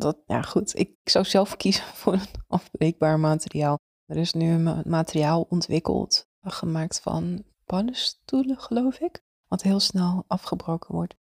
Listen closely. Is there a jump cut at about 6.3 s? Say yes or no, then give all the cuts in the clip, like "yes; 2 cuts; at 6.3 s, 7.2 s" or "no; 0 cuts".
no; 1 cut; at 0.9 s